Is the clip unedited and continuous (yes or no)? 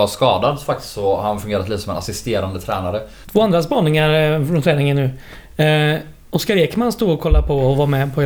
no